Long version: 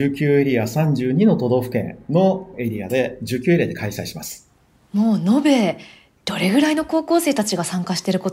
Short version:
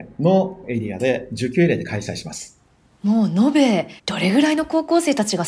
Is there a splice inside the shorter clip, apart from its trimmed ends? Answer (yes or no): yes